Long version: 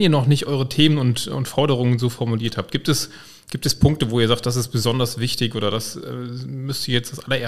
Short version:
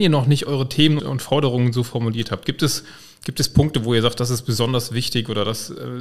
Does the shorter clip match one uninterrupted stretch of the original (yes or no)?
no